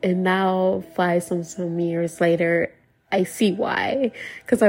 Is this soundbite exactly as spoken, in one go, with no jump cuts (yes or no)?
yes